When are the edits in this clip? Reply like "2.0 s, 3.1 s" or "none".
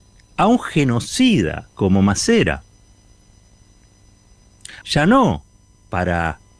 1.7 s, 4.8 s